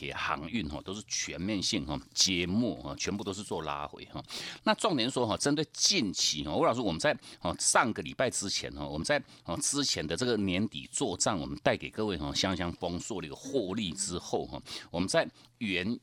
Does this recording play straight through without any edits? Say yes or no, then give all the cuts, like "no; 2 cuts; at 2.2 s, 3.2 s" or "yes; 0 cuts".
no; 1 cut; at 4.6 s